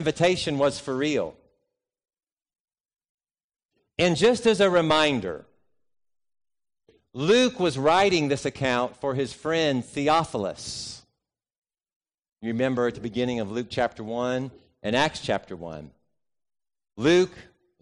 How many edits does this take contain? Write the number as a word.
zero